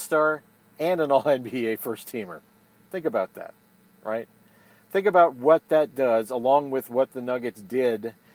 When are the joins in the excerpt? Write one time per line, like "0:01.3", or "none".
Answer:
none